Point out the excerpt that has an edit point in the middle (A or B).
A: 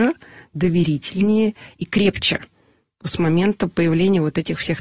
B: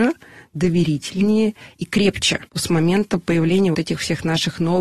B